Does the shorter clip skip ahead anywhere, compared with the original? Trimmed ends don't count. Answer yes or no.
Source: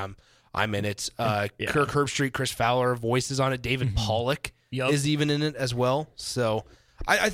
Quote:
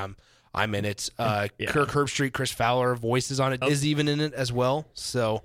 yes